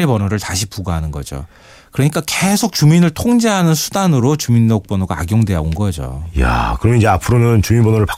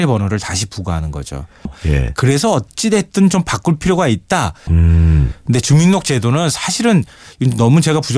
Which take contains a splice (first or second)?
second